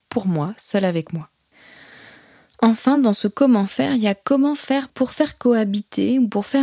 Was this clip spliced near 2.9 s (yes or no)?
no